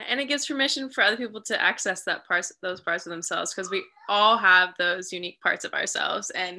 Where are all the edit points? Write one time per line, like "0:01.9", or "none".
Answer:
none